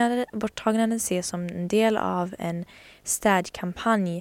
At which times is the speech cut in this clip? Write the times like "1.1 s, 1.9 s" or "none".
none